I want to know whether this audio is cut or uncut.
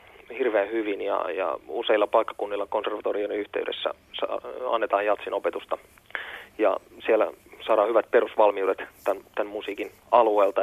uncut